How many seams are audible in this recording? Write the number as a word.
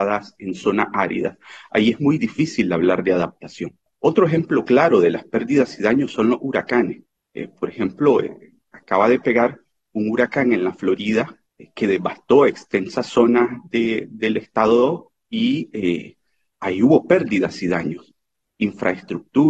zero